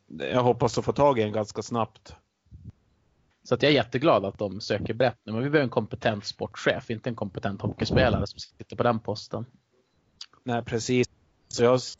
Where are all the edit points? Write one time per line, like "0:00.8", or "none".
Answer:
0:03.3

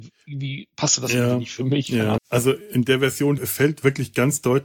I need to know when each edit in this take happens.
0:02.2
0:03.4

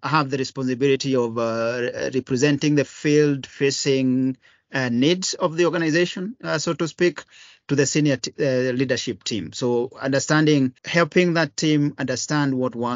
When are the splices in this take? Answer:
0:10.8

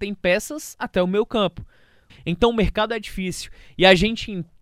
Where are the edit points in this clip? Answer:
0:02.1

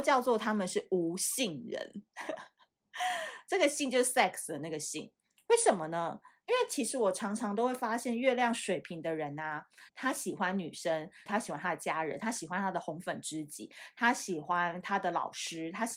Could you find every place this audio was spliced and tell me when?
0:09.9
0:11.3

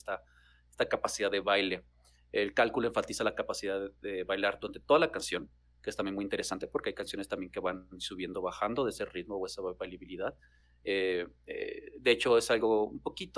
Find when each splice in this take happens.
none

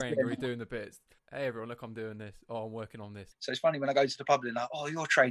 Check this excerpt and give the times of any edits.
0:01.2
0:03.3

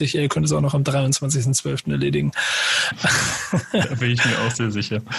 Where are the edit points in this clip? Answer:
none

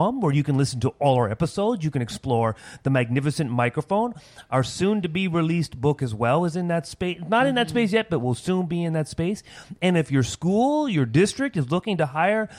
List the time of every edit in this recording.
none

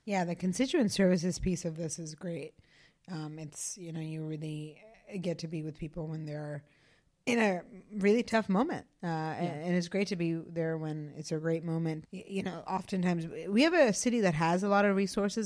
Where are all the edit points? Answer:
0:12.0

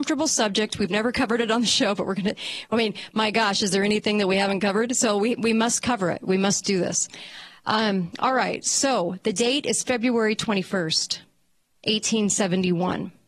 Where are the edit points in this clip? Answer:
none

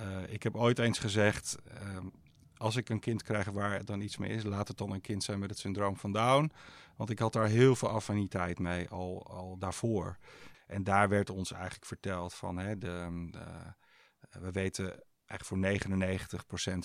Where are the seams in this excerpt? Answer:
0:10.5

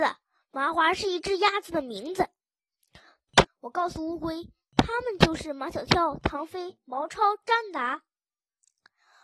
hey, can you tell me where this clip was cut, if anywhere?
0:03.4

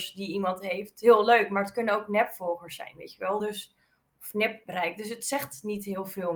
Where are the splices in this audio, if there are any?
none

